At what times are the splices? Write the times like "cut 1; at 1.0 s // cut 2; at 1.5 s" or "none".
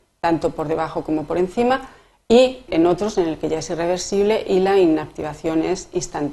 cut 1; at 2.7 s